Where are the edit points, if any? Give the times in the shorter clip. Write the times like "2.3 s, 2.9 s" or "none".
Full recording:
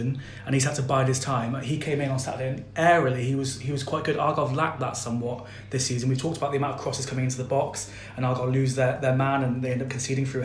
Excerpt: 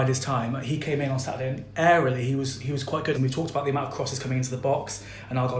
3.1 s